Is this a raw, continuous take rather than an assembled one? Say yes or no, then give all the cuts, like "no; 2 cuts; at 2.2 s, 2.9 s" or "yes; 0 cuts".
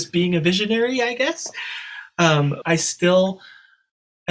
no; 1 cut; at 2.6 s